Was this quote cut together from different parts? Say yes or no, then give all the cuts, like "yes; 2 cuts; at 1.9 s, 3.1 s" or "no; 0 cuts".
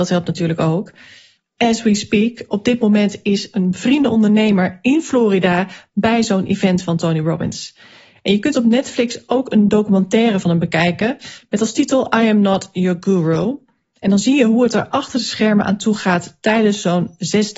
no; 0 cuts